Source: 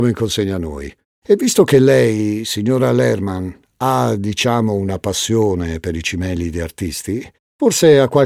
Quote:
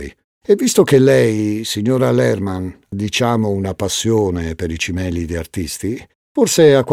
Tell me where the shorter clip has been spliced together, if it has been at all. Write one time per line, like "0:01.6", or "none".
0:02.9